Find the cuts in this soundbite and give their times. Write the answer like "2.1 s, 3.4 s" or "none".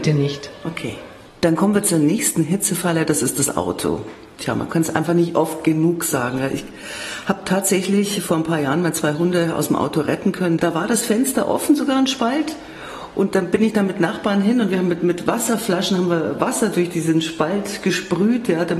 10.6 s